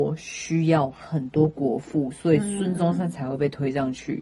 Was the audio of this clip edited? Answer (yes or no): no